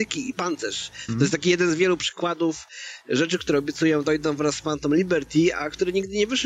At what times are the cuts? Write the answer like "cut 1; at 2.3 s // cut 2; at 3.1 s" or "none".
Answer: cut 1; at 1.1 s